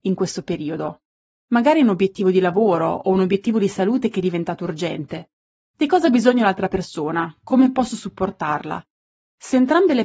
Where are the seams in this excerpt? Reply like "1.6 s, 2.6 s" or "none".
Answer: none